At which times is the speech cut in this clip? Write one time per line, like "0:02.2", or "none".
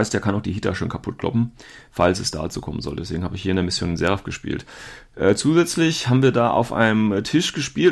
none